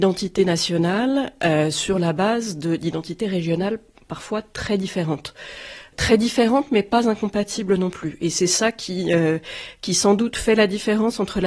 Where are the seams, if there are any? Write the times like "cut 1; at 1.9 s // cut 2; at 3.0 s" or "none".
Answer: none

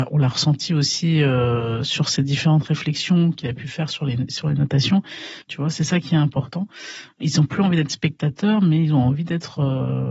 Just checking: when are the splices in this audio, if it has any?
cut 1; at 5.4 s

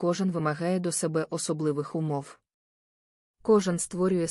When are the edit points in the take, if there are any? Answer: none

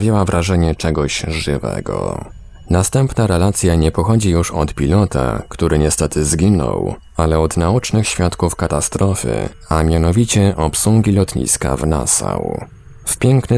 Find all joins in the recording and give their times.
none

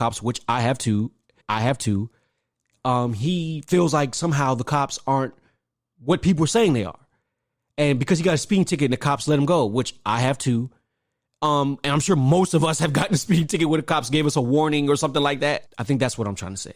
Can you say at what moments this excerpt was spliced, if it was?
cut 1; at 1.4 s // cut 2; at 15.7 s

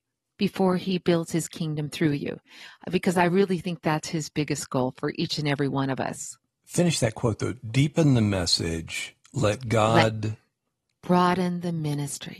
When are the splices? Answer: none

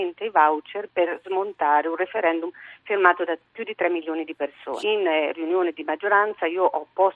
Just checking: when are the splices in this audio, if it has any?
cut 1; at 4.8 s

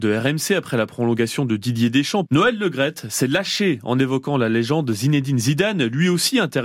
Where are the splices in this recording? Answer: cut 1; at 2.3 s

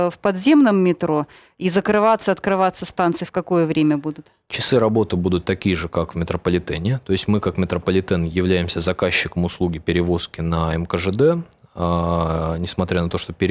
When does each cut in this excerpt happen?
none

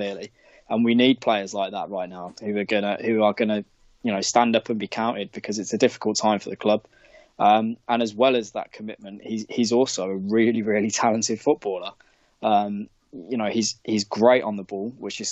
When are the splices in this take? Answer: none

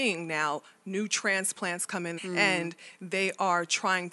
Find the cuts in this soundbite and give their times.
cut 1; at 2.2 s

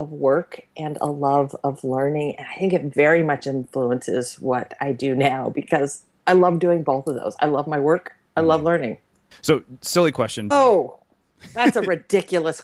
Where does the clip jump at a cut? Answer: cut 1; at 9.3 s // cut 2; at 10.5 s

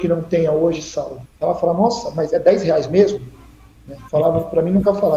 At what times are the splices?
cut 1; at 1.3 s // cut 2; at 4.1 s

